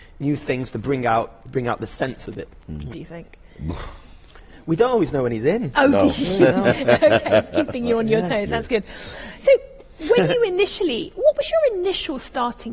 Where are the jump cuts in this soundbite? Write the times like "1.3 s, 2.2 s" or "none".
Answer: 2.9 s